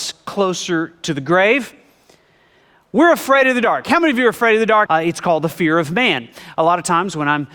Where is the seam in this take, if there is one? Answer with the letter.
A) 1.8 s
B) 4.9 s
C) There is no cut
B